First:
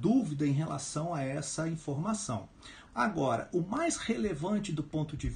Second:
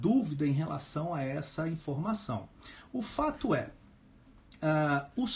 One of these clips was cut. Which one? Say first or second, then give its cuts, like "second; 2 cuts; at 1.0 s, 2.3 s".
first; 1 cut; at 2.9 s